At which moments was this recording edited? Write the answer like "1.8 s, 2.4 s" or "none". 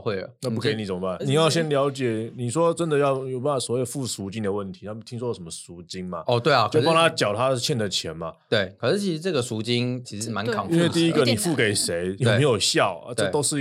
1.2 s, 10.0 s, 12.2 s